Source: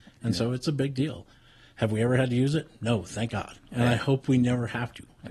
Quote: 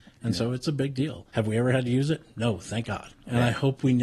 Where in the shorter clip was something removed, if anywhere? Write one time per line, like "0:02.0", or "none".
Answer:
0:01.3